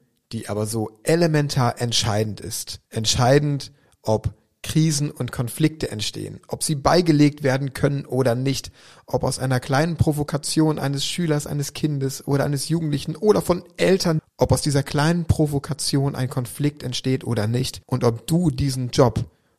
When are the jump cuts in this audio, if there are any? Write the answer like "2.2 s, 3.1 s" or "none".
2.9 s, 14.2 s, 17.8 s

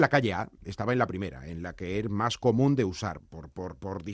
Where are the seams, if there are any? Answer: 3.2 s

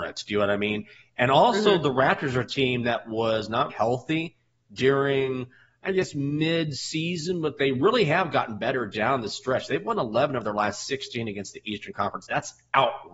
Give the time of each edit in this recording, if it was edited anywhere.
3.7 s

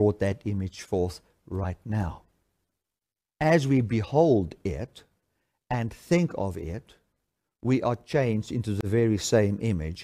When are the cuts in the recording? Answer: 3.3 s

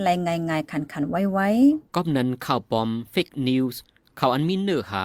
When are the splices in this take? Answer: 1.9 s

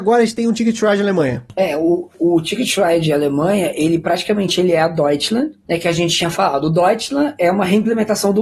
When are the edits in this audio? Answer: none

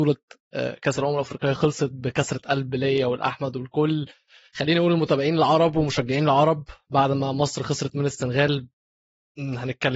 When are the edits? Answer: none

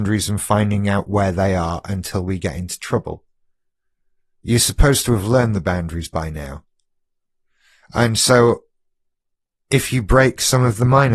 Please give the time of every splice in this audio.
none

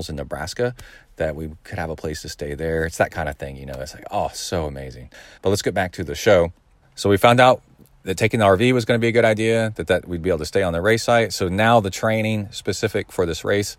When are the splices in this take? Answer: 5.4 s, 6.8 s

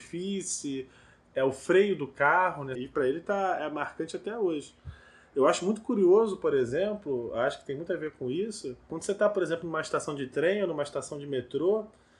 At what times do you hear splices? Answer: 2.8 s

